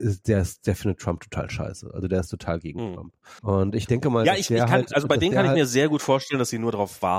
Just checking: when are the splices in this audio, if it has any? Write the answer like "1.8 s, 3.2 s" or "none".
3.4 s